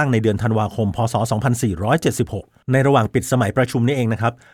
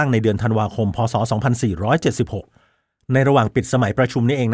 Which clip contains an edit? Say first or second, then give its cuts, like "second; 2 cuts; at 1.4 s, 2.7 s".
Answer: first; 1 cut; at 2.6 s